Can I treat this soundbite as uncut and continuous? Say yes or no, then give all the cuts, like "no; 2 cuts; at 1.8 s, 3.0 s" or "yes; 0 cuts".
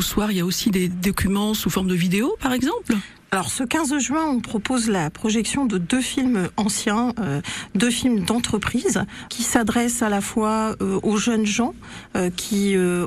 no; 1 cut; at 9.3 s